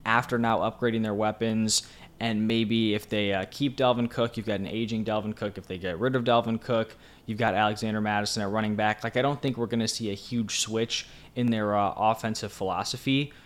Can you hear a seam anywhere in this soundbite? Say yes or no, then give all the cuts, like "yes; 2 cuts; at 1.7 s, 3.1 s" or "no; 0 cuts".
no; 0 cuts